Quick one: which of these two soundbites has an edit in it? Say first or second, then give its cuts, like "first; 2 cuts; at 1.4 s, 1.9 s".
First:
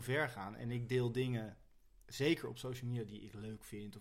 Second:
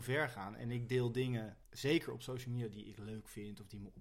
second; 1 cut; at 1.6 s